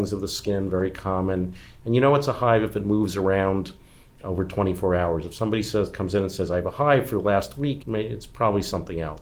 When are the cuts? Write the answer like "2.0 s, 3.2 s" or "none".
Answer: 7.8 s